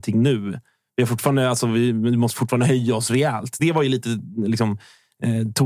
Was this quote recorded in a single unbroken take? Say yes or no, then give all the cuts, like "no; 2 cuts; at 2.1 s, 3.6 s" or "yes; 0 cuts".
yes; 0 cuts